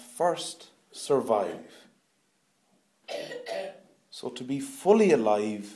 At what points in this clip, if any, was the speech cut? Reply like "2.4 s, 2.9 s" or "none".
none